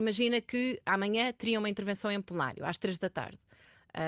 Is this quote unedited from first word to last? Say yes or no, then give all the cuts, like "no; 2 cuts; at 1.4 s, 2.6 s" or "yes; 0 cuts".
yes; 0 cuts